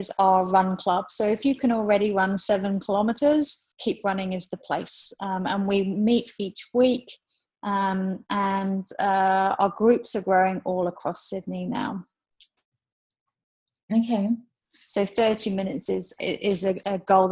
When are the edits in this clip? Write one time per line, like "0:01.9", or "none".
0:14.6
0:16.2